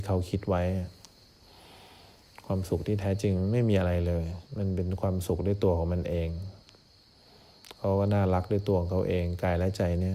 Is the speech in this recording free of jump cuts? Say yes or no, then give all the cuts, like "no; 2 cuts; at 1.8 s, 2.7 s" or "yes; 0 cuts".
no; 1 cut; at 4.5 s